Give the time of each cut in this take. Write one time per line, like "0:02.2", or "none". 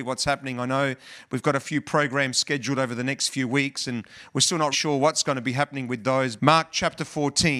0:04.7
0:06.4